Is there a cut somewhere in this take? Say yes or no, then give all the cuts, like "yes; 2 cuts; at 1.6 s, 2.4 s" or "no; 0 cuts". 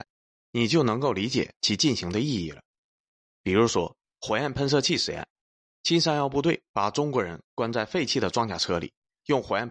no; 0 cuts